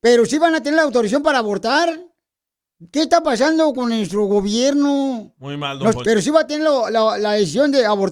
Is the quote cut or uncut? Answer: cut